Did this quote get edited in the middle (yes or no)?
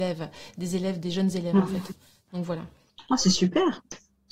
no